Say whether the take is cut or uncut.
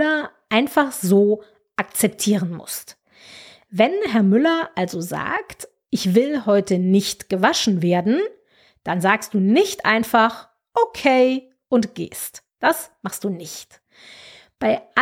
uncut